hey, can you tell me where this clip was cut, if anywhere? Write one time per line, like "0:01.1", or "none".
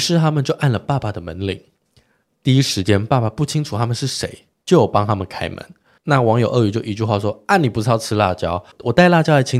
none